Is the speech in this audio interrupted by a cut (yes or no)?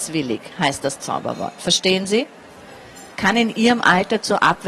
yes